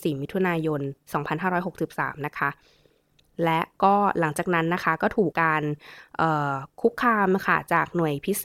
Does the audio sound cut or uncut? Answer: cut